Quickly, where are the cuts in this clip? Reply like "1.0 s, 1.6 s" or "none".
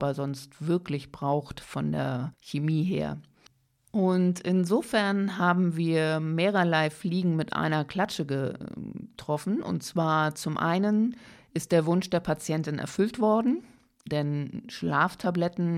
2.3 s, 14.1 s